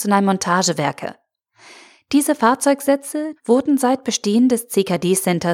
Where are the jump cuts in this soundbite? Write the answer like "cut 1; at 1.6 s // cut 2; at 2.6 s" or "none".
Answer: cut 1; at 3.4 s